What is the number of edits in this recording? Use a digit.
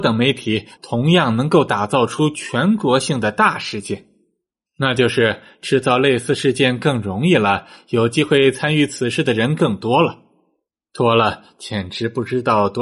1